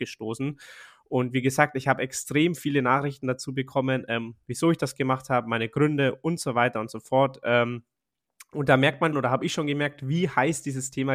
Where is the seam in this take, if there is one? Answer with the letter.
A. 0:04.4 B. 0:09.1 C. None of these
B